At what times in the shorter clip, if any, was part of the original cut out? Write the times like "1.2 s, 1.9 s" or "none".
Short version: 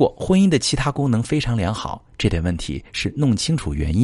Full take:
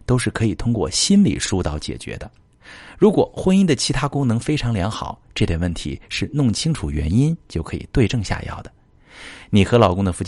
none